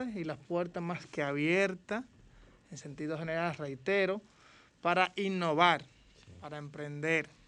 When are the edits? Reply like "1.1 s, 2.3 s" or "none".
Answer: none